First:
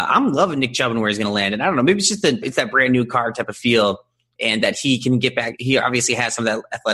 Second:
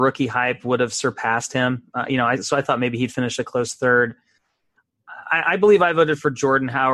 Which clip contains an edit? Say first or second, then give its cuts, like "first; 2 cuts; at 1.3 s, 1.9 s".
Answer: first; 1 cut; at 2.4 s